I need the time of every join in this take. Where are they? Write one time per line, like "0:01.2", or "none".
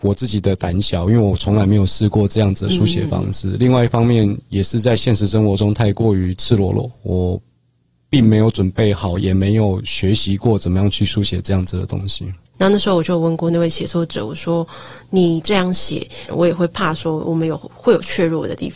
0:12.5
0:16.3